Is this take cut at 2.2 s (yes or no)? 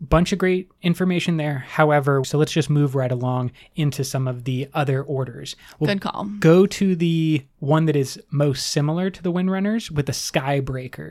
yes